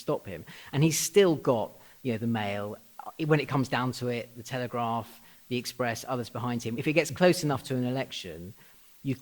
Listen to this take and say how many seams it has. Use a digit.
0